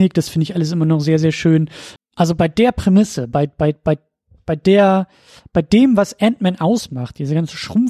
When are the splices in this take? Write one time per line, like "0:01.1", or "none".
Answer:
0:02.0